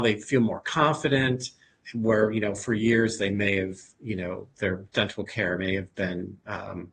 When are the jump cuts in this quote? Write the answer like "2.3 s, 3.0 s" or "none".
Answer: 1.8 s